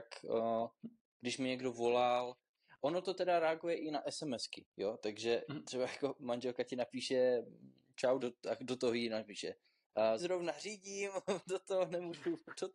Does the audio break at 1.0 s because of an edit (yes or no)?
no